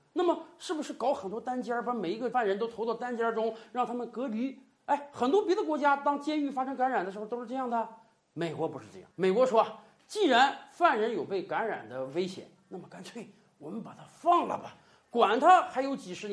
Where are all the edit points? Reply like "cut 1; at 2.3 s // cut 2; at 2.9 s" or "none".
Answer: cut 1; at 9.1 s